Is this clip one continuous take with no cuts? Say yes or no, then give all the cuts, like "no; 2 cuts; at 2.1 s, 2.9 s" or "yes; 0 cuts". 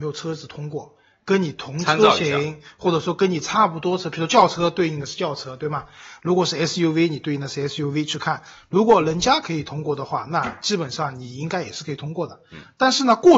yes; 0 cuts